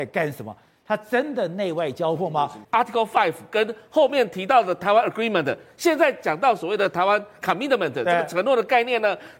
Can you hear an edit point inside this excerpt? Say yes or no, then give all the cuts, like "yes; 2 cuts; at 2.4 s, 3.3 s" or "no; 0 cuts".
yes; 1 cut; at 2.6 s